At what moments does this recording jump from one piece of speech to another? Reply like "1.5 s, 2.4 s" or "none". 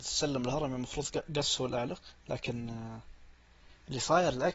2.2 s